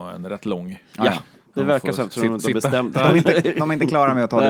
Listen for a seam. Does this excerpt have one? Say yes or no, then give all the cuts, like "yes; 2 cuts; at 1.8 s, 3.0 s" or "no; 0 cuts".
yes; 1 cut; at 2.9 s